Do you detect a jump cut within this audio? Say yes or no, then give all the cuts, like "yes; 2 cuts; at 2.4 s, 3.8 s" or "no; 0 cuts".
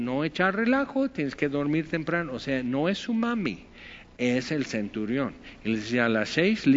no; 0 cuts